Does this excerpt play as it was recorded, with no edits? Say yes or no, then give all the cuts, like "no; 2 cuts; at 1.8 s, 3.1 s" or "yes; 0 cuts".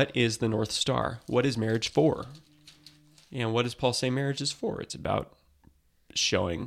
yes; 0 cuts